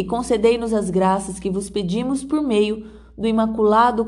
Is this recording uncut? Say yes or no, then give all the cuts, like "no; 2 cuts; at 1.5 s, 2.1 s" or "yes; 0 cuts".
yes; 0 cuts